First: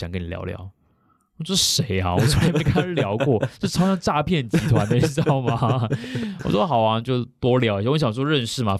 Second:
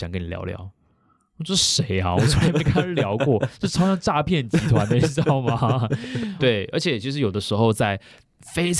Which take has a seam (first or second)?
second